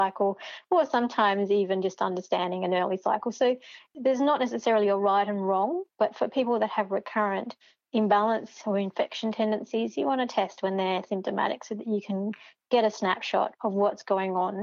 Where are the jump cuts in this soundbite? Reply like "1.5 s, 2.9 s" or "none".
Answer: none

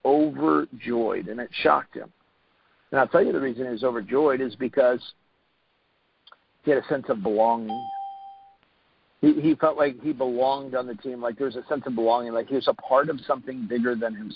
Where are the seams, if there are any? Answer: none

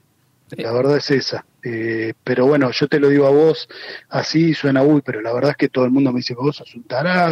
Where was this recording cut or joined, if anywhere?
5.0 s

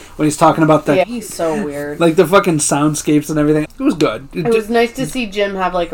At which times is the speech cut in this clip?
1.0 s, 3.6 s

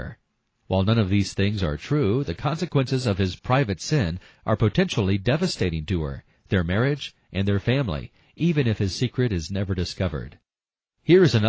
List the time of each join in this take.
none

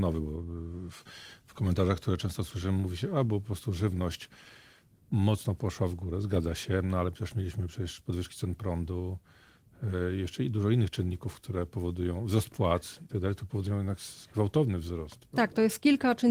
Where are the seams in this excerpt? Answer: none

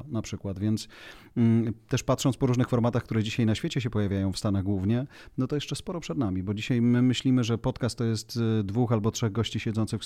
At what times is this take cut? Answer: none

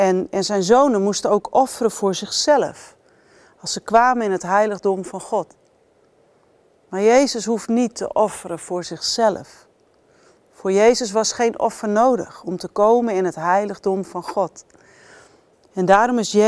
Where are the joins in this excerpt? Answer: none

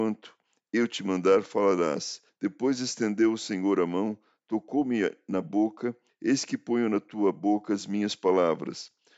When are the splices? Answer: 2.3 s, 6.1 s

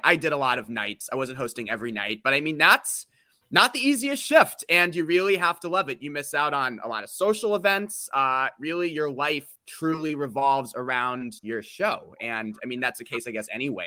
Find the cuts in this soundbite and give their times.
9.6 s, 11.4 s

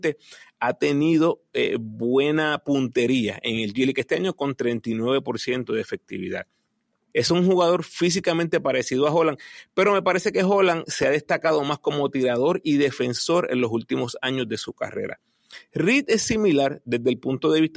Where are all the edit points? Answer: 7.1 s

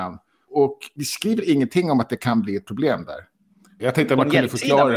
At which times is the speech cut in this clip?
3.8 s

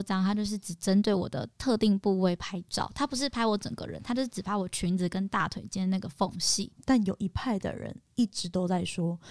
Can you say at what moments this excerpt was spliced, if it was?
6.8 s

